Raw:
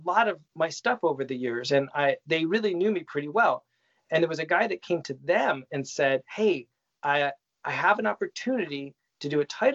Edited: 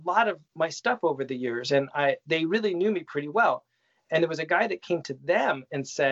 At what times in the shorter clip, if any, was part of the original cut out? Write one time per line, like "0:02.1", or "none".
none